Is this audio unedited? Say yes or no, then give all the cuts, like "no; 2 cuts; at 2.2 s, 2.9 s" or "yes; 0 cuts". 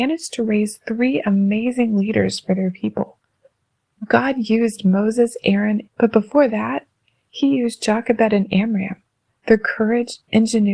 no; 1 cut; at 5.8 s